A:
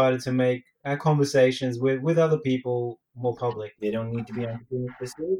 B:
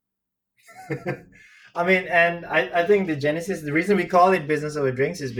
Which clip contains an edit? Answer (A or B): A